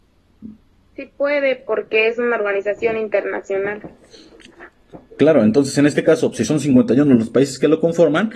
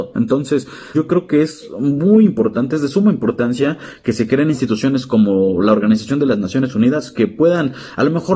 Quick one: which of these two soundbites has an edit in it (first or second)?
second